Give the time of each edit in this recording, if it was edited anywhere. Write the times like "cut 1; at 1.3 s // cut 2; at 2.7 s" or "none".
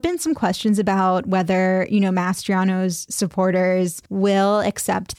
cut 1; at 4.1 s